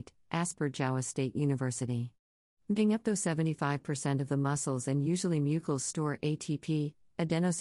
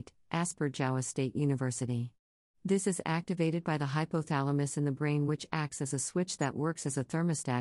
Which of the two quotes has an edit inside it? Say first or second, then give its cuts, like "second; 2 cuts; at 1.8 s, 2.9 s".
second; 1 cut; at 2.5 s